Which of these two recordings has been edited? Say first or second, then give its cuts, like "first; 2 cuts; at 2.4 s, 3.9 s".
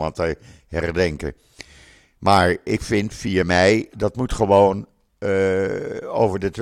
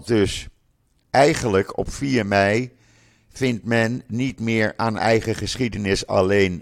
first; 1 cut; at 3.9 s